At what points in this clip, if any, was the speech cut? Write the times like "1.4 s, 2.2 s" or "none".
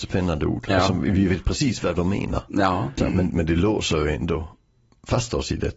3.0 s